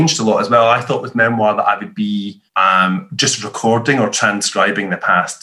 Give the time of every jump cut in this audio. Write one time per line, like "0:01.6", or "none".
0:02.5